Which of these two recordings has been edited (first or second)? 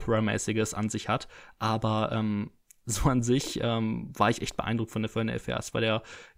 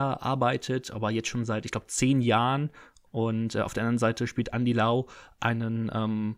second